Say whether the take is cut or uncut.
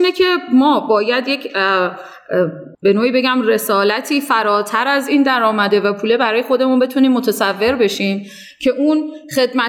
cut